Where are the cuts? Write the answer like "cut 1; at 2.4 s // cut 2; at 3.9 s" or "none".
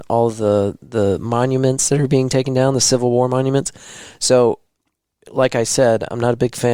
none